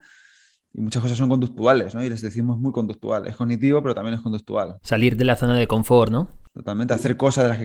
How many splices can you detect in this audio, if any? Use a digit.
1